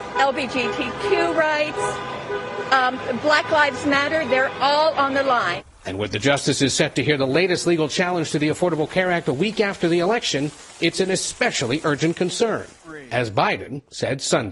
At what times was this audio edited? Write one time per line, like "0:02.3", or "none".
none

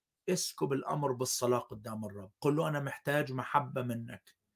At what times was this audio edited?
0:02.3

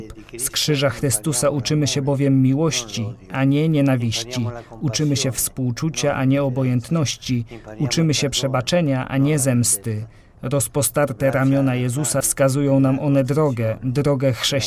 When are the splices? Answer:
none

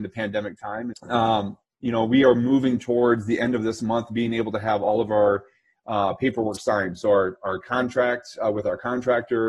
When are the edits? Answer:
0:00.9

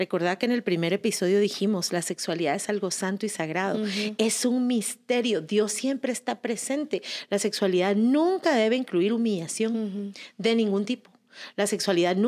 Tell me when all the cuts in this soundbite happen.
none

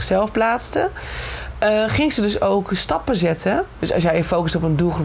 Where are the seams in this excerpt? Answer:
0:03.8

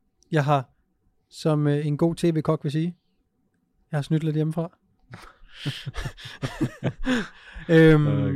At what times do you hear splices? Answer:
none

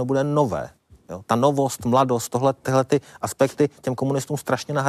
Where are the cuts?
0:01.3

